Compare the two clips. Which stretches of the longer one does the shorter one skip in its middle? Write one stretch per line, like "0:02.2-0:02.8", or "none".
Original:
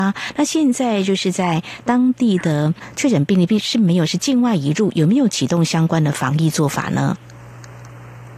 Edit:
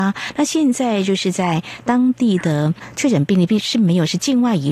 none

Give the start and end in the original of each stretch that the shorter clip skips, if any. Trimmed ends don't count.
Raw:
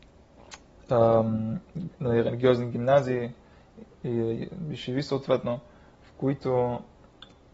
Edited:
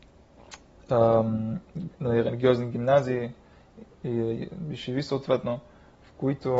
none

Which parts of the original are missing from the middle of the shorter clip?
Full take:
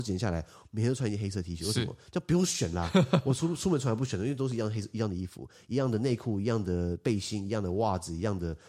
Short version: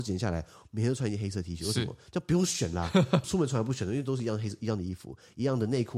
0:03.2-0:03.6

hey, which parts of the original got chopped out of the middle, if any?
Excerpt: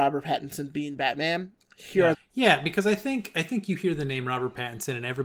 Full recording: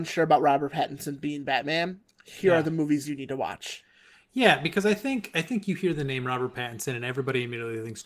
0:02.6-0:04.1

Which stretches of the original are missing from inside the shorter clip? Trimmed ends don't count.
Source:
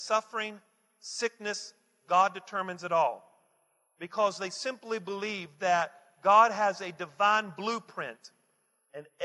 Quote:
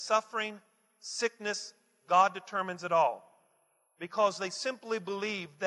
none

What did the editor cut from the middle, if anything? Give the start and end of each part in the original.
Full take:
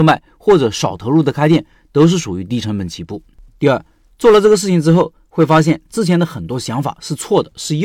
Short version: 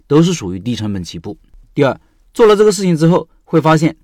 none

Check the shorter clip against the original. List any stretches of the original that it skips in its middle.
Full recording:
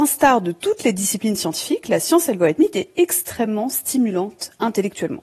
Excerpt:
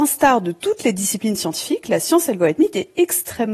none

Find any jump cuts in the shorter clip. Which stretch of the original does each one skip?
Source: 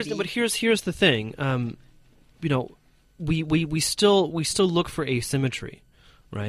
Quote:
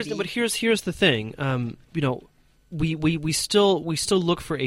0:01.8-0:02.3

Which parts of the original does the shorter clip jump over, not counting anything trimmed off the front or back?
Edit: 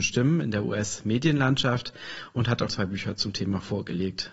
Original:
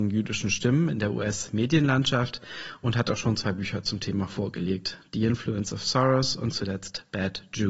0:03.2-0:03.4

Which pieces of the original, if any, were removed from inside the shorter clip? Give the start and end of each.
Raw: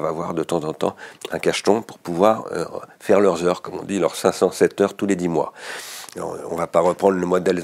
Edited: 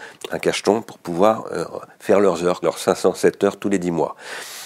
0:03.6-0:04.0

